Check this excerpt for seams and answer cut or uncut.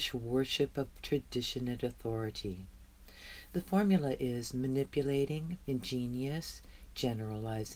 cut